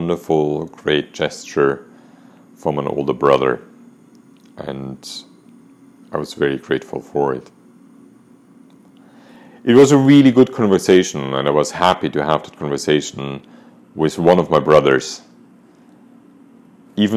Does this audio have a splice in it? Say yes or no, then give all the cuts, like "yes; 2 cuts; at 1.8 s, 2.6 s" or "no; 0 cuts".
no; 0 cuts